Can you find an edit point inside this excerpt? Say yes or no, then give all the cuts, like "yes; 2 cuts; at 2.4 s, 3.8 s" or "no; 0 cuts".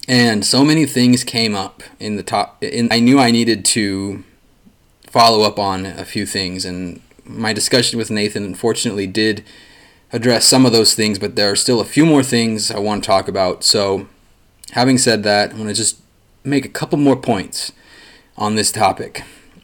yes; 1 cut; at 2.9 s